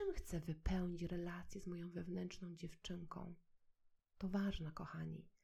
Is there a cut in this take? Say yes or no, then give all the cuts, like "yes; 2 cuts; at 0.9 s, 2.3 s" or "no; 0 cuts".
yes; 1 cut; at 4.0 s